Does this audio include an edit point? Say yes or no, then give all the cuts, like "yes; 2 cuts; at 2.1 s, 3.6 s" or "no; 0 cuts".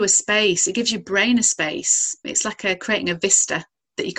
yes; 1 cut; at 2.2 s